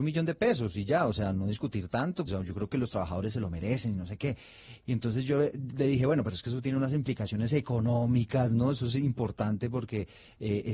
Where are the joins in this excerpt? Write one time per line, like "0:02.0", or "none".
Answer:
0:02.3